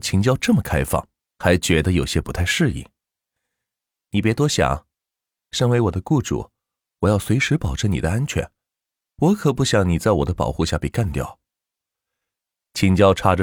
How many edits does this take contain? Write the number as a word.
one